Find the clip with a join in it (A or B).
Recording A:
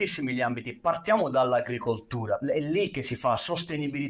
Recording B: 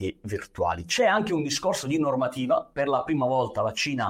A